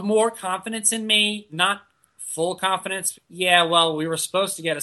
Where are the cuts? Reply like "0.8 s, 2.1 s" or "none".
3.1 s